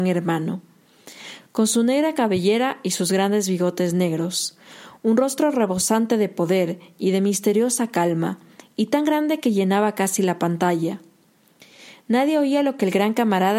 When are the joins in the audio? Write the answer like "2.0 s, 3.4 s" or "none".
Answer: none